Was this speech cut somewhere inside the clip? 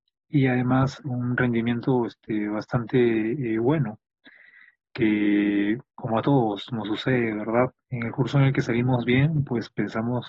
yes; 2 cuts; at 1.0 s, 7.8 s

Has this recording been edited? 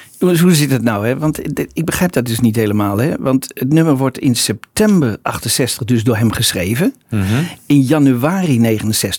no; 0 cuts

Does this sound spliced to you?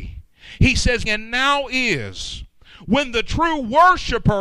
yes; 1 cut; at 1.1 s

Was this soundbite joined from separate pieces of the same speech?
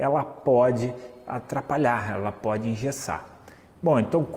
no; 0 cuts

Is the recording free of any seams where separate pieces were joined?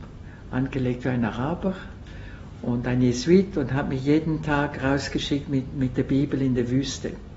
yes; 0 cuts

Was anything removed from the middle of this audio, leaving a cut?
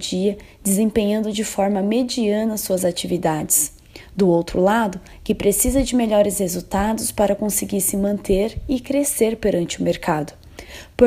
yes; 1 cut; at 5.2 s

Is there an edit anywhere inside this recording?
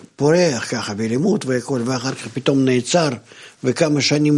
no; 0 cuts

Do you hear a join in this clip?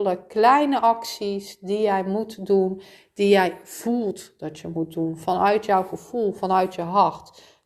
no; 0 cuts

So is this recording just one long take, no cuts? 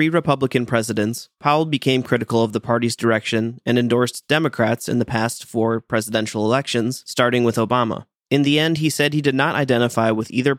yes; 0 cuts

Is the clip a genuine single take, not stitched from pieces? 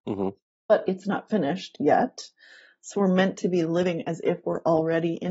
yes; 0 cuts

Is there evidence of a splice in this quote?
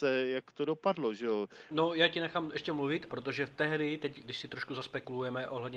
yes; 3 cuts; at 1.7 s, 3.1 s, 4.2 s

